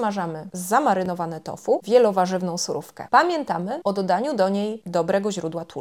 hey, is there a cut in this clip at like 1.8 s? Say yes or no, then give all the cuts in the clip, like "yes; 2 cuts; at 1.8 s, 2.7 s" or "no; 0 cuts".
yes; 1 cut; at 1.8 s